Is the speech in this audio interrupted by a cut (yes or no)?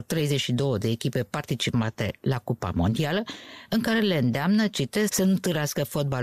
yes